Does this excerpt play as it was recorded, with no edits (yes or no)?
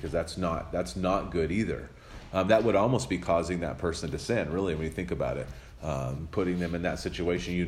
yes